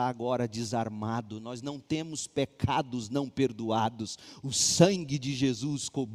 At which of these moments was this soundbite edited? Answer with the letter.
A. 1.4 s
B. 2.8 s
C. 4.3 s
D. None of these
D